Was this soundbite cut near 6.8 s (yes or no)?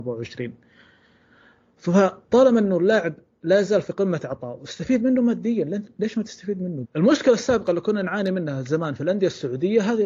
yes